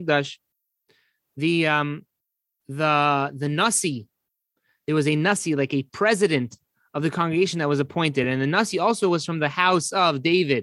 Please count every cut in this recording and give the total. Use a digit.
0